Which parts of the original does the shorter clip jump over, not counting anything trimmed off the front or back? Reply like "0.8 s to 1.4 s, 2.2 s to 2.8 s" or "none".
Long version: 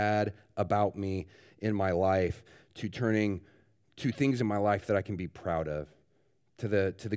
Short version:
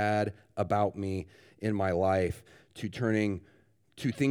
none